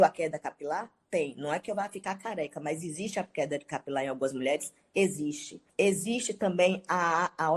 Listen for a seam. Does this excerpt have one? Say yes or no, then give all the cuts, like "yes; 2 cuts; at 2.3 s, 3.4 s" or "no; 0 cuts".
yes; 1 cut; at 5.7 s